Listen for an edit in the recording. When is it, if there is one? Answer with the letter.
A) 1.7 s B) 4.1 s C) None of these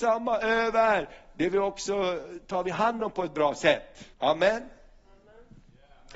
B